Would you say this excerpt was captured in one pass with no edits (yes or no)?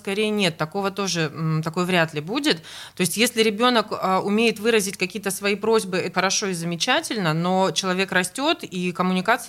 no